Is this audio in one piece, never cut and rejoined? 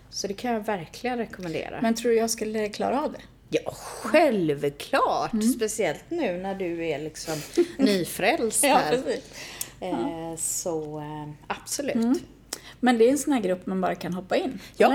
yes; 0 cuts

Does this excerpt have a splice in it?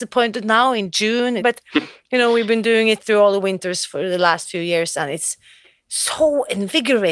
yes; 1 cut; at 1.4 s

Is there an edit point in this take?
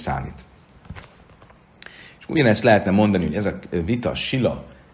no; 0 cuts

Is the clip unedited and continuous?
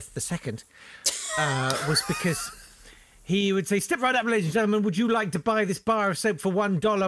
yes; 0 cuts

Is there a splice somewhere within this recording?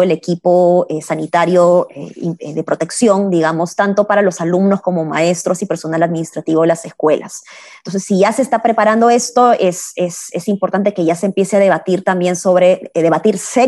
no; 0 cuts

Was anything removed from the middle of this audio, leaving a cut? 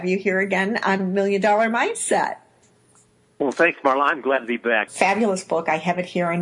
yes; 1 cut; at 4.9 s

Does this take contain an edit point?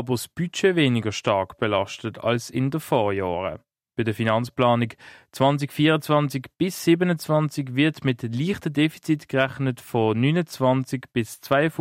no; 0 cuts

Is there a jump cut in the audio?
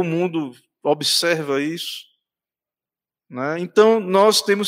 no; 0 cuts

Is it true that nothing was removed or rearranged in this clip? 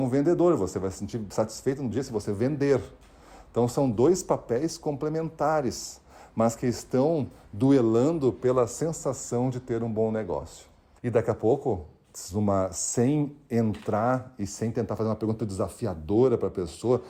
no; 2 cuts; at 11.0 s, 15.4 s

